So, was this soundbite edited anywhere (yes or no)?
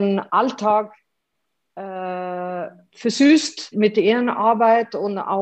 yes